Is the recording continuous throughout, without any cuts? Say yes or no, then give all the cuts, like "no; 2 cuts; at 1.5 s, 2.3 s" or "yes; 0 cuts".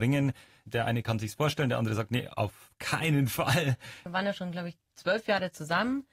no; 1 cut; at 4.1 s